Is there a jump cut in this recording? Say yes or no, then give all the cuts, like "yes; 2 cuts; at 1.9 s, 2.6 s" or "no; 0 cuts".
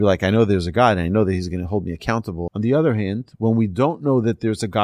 yes; 1 cut; at 2.5 s